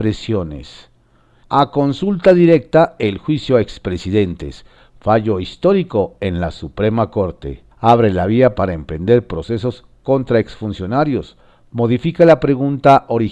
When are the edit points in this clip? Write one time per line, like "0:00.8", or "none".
0:01.4
0:04.9
0:07.7